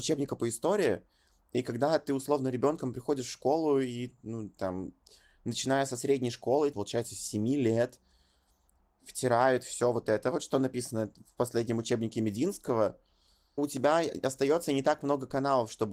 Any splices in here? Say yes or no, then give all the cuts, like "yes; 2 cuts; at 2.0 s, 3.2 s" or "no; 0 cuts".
yes; 2 cuts; at 6.7 s, 13.6 s